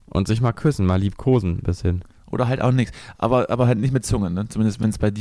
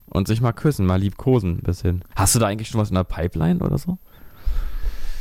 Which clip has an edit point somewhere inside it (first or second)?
second